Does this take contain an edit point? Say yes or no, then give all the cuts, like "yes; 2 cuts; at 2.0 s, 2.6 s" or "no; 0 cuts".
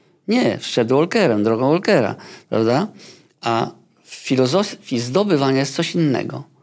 no; 0 cuts